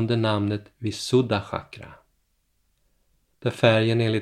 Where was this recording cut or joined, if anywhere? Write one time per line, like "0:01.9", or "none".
0:03.3